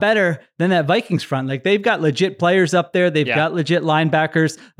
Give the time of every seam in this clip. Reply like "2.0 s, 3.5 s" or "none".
none